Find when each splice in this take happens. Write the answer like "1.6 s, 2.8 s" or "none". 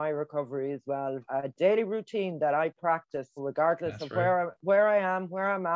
1.2 s, 3.4 s